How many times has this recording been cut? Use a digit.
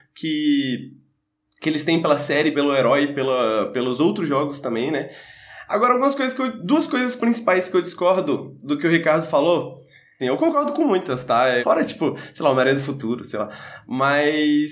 3